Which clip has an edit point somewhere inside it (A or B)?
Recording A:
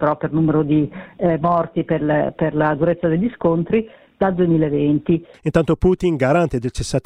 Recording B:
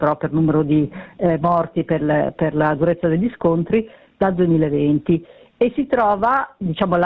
A